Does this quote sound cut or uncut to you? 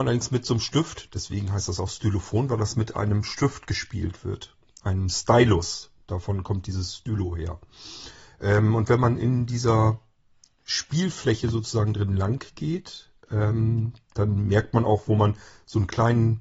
uncut